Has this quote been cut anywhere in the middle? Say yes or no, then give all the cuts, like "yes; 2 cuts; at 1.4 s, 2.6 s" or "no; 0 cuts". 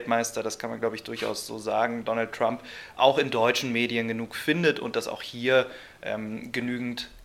no; 0 cuts